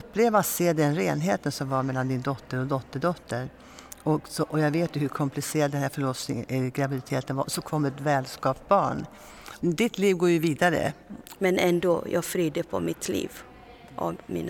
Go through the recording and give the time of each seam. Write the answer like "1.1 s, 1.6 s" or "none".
9.6 s, 11.3 s